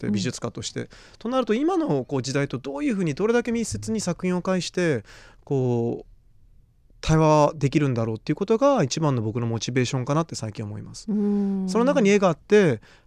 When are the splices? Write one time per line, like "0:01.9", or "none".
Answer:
none